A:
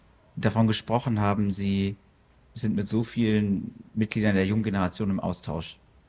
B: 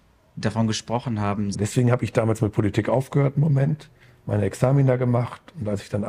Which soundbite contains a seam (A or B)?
B